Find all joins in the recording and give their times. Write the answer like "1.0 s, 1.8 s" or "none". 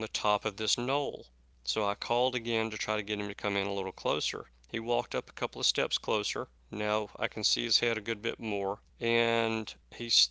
1.5 s, 8.9 s